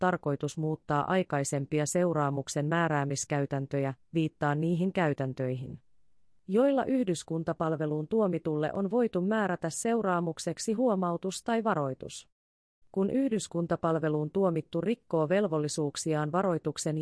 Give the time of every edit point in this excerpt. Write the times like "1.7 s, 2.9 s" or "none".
12.8 s